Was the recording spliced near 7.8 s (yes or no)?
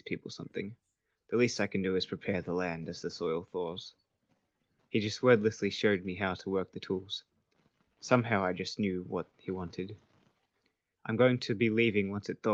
no